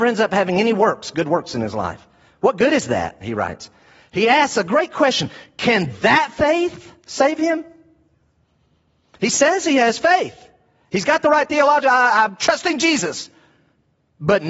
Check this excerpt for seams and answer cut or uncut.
uncut